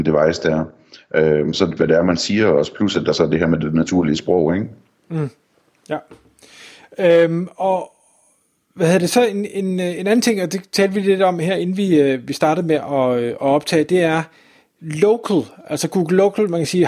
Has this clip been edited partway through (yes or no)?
yes